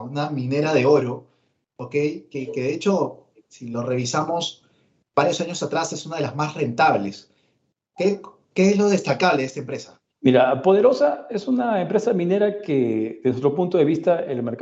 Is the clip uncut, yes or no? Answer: no